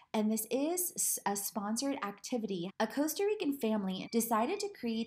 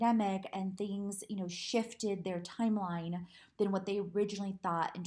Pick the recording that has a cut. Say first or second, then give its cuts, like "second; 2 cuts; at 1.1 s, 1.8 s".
first; 2 cuts; at 2.7 s, 4.0 s